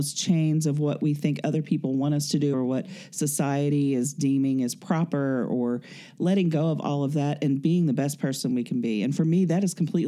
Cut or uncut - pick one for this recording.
cut